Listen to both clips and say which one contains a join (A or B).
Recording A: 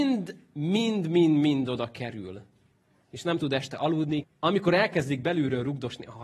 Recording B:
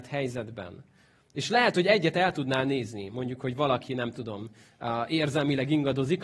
A